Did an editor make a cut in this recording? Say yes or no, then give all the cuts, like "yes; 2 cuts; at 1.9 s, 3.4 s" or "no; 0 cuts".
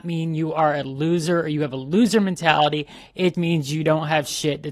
yes; 1 cut; at 3.3 s